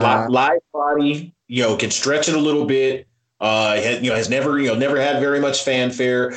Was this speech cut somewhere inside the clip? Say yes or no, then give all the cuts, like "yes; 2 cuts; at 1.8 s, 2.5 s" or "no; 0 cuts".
no; 0 cuts